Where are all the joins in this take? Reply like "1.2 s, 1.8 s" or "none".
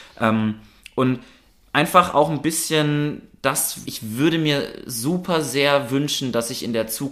3.8 s